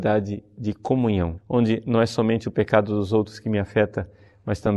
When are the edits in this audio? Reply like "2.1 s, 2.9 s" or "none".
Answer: 1.4 s